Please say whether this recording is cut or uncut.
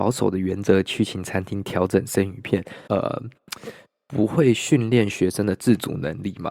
cut